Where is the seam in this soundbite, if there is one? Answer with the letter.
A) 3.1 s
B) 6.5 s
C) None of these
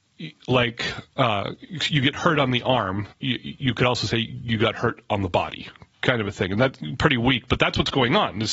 A